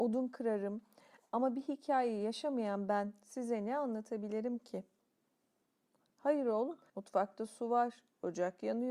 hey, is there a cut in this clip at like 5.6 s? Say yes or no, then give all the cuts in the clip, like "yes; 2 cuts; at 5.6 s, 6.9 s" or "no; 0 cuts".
no; 1 cut; at 6.9 s